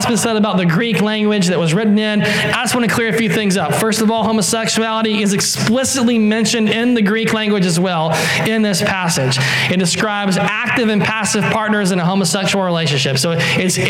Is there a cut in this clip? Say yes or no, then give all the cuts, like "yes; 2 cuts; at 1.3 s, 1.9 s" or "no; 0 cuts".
no; 0 cuts